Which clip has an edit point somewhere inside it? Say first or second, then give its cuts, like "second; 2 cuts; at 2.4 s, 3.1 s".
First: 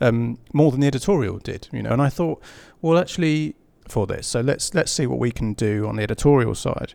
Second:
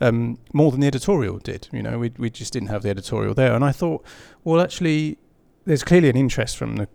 first; 2 cuts; at 1.9 s, 3.8 s